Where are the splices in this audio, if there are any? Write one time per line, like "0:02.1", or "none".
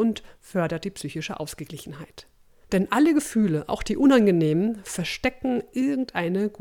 0:02.6